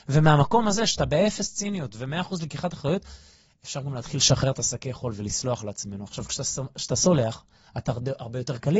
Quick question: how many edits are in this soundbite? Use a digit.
0